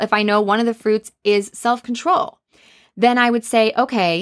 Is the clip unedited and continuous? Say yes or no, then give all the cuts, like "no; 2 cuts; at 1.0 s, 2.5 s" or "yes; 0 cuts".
yes; 0 cuts